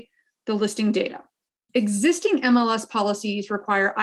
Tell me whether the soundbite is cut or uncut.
cut